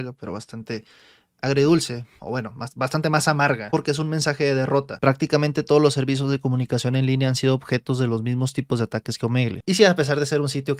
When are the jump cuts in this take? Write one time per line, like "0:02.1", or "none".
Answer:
0:05.0
0:09.6